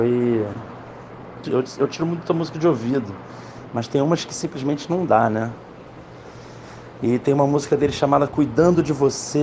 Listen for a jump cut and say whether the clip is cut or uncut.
cut